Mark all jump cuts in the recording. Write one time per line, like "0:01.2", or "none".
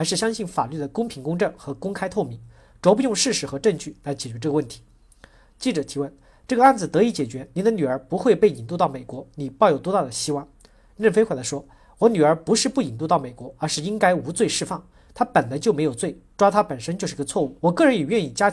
0:17.6